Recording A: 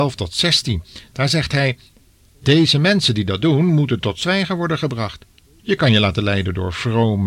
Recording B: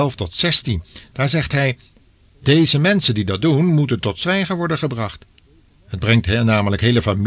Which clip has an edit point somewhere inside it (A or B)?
A